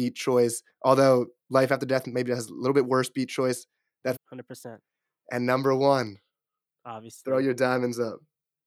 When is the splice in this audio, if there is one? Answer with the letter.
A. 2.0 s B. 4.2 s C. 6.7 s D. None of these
B